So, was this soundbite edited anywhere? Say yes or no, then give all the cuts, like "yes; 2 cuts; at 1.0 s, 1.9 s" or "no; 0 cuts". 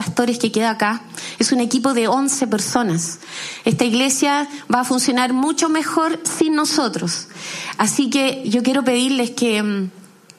yes; 1 cut; at 8.4 s